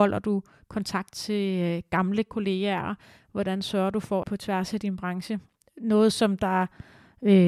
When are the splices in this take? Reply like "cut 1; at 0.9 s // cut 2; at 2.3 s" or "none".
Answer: cut 1; at 4.2 s